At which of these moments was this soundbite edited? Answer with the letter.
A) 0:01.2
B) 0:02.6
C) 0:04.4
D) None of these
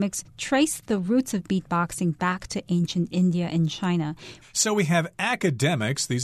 C